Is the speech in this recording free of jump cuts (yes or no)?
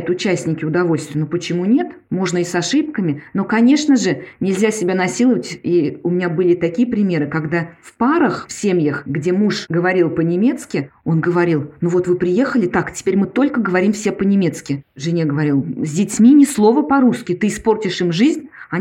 yes